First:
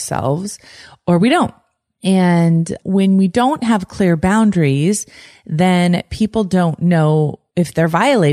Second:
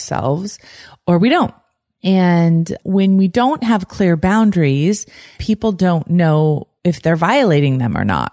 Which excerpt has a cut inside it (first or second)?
second